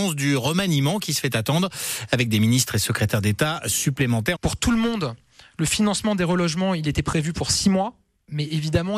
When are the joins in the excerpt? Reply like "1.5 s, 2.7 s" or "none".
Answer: 4.4 s